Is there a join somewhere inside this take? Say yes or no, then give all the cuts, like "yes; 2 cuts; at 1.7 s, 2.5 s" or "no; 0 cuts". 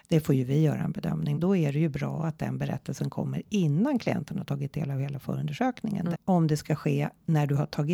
yes; 2 cuts; at 1.3 s, 6.1 s